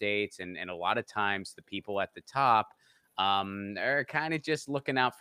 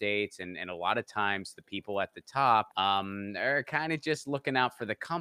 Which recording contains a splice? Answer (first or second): second